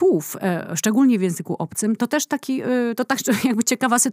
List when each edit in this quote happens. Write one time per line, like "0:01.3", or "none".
0:02.0